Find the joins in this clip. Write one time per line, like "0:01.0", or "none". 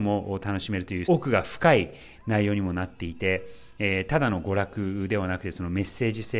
0:01.0